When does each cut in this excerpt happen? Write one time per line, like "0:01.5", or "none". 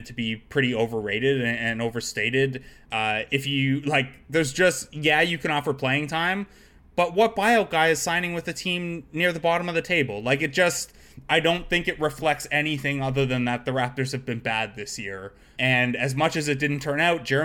0:02.8
0:15.5